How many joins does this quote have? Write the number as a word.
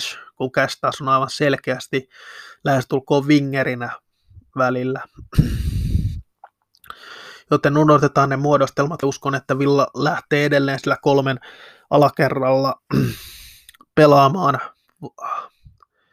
one